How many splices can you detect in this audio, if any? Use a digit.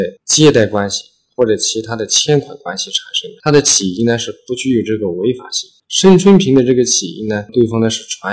0